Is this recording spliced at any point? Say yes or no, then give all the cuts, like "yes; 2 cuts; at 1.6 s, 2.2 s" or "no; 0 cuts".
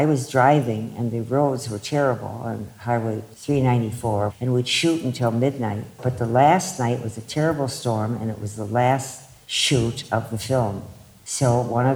no; 0 cuts